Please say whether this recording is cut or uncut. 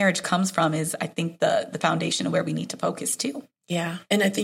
uncut